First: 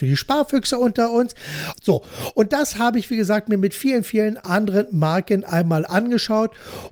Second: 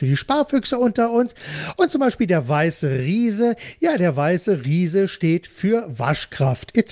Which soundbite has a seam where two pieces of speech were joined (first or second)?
first